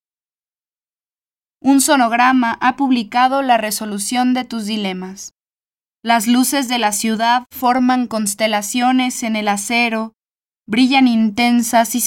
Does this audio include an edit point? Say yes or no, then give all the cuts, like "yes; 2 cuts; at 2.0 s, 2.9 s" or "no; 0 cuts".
yes; 1 cut; at 6.0 s